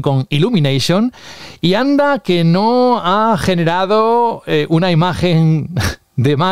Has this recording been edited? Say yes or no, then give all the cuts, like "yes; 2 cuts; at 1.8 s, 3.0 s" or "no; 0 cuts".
no; 0 cuts